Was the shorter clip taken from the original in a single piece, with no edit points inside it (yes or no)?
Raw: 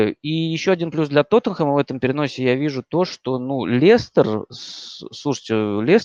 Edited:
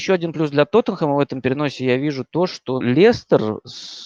no